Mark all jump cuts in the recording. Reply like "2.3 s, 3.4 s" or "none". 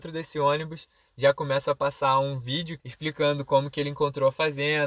2.8 s